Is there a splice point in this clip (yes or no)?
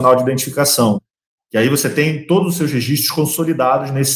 no